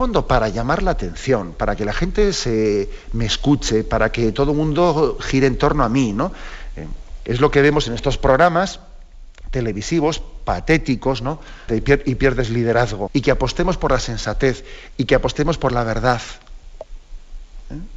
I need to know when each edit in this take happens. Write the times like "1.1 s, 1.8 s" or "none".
11.7 s, 13.1 s